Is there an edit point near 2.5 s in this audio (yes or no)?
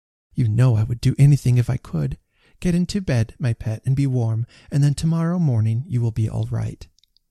no